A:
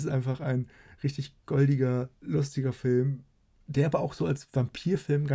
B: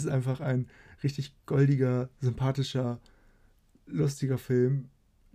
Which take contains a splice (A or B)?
A